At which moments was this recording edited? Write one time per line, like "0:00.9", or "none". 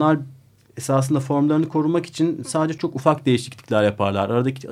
0:02.8

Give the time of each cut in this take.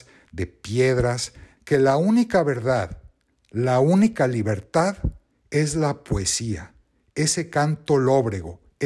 0:01.6

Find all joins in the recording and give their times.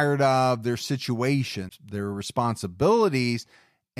0:01.7

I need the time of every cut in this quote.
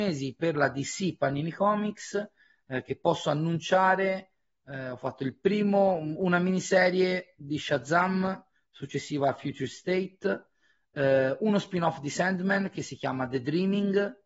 none

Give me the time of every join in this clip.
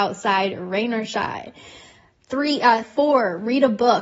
0:02.8

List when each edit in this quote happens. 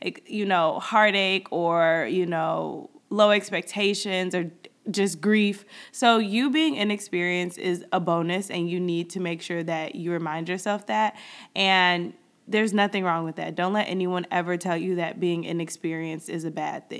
none

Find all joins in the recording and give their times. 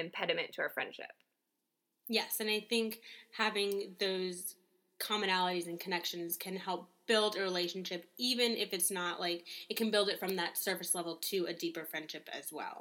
none

